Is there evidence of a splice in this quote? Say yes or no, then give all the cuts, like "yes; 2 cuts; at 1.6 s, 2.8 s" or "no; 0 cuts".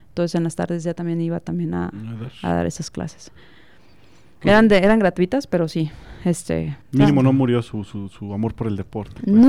yes; 1 cut; at 6.8 s